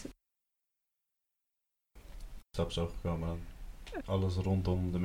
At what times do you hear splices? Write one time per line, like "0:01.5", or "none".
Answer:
0:02.4
0:04.0